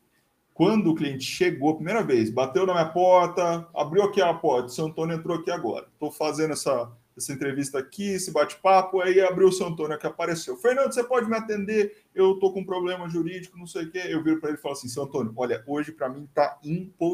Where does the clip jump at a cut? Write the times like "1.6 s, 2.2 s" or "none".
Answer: none